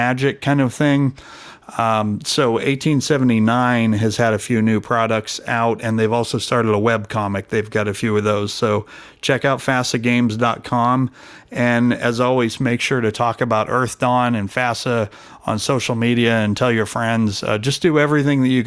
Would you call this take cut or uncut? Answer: uncut